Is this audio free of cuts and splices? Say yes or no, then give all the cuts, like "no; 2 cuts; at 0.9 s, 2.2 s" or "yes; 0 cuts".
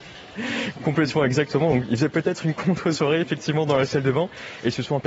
yes; 0 cuts